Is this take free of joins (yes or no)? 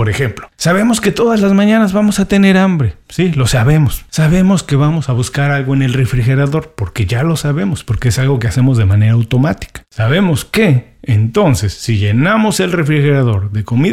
yes